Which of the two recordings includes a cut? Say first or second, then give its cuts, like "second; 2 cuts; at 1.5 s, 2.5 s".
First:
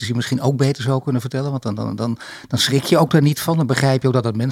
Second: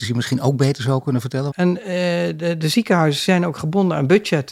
second; 1 cut; at 1.5 s